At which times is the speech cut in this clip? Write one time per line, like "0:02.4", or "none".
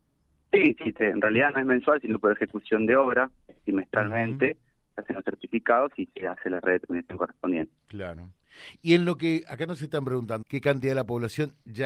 0:07.8
0:10.4